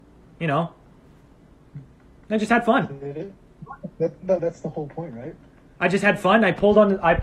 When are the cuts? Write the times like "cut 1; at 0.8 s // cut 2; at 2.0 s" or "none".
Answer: cut 1; at 3.4 s // cut 2; at 4.4 s